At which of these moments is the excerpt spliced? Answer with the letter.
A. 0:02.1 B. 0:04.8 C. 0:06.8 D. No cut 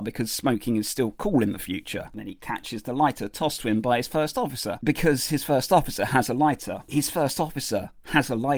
D